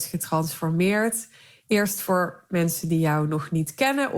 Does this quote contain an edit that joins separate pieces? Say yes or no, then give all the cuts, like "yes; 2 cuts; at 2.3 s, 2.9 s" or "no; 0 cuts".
no; 0 cuts